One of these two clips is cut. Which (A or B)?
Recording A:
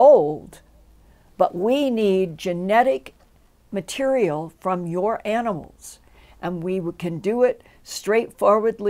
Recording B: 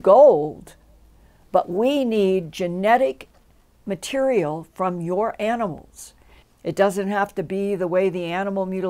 B